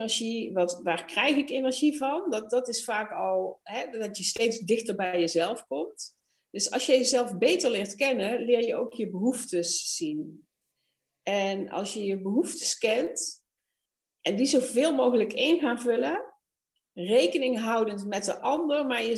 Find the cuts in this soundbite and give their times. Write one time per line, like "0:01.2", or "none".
none